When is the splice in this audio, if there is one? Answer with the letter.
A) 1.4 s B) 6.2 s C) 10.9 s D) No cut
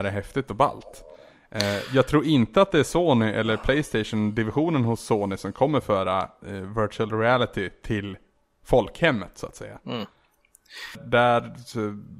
C